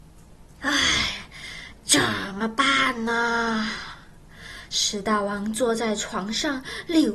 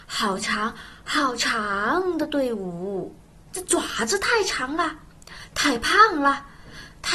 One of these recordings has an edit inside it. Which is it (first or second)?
second